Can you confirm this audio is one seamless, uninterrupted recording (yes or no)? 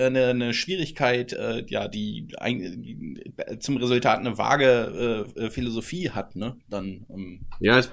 yes